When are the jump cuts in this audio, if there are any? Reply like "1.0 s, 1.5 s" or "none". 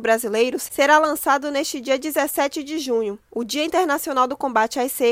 none